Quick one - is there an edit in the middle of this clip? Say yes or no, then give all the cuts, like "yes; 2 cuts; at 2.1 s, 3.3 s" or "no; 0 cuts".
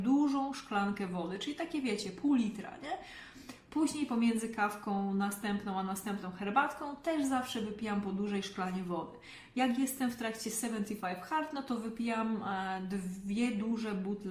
no; 0 cuts